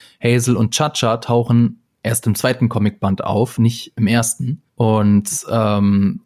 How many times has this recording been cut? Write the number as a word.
one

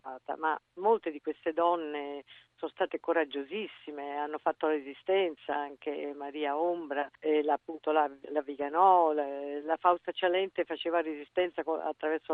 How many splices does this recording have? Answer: zero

